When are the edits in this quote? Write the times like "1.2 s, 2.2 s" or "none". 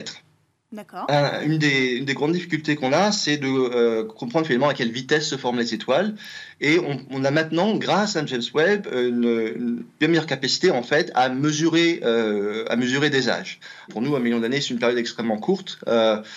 13.9 s